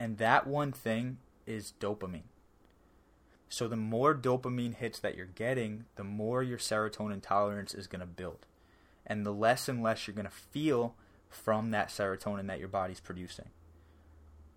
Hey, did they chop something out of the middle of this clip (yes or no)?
no